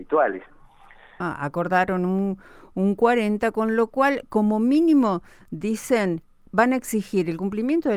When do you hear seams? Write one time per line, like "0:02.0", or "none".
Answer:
0:01.2